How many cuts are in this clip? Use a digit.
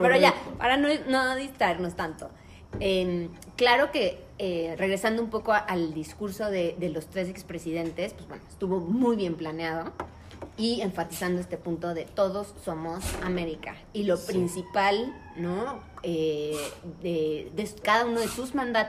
0